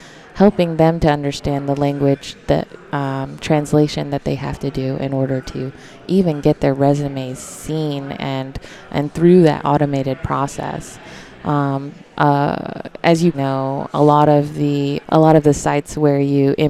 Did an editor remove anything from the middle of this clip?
yes; 2 cuts; at 13.3 s, 15.0 s

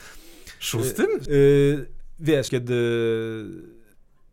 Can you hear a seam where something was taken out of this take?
yes; 2 cuts; at 1.3 s, 2.5 s

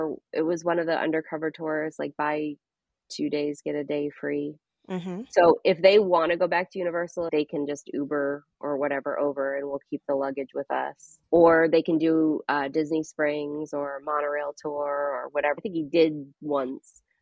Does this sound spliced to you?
yes; 2 cuts; at 7.3 s, 15.6 s

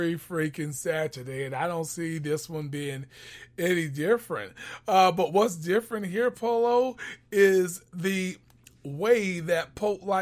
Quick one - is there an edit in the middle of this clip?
no; 0 cuts

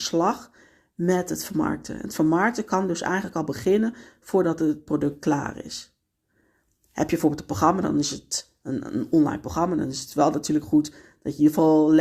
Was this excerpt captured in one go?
yes; 0 cuts

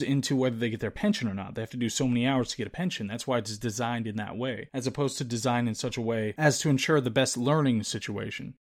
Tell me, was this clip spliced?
no; 0 cuts

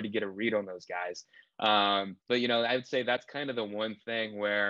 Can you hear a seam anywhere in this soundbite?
yes; 1 cut; at 2.2 s

